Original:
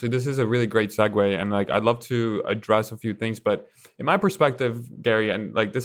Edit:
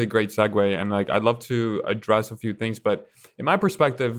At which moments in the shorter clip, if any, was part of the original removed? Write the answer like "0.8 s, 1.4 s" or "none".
none